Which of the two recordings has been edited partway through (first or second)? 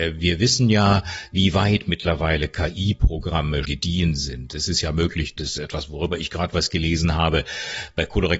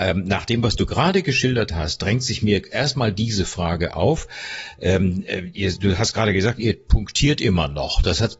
first